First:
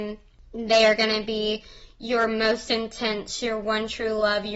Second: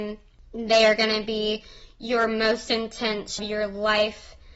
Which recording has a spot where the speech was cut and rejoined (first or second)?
second